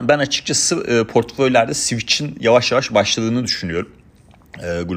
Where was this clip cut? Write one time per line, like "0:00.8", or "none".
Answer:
none